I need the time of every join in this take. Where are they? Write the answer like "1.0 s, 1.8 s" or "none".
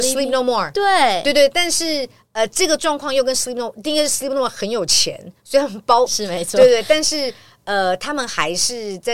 6.1 s